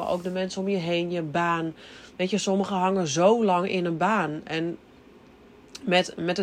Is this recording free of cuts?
yes; 0 cuts

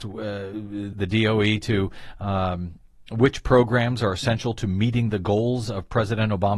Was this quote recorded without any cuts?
no; 1 cut; at 0.9 s

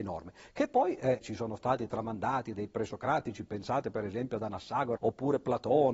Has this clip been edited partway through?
yes; 2 cuts; at 1.2 s, 5.0 s

